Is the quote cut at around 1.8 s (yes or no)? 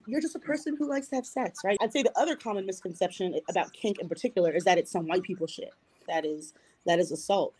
yes